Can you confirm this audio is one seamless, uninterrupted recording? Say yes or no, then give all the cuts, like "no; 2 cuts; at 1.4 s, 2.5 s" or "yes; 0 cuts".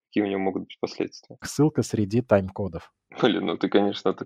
no; 1 cut; at 1.4 s